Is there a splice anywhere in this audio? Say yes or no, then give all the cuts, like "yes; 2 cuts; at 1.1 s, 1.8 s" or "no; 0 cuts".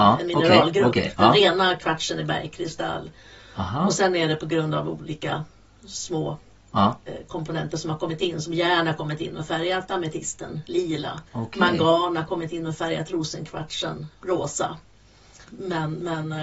yes; 2 cuts; at 11.3 s, 15.4 s